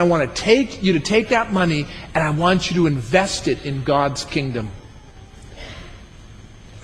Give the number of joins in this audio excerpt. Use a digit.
0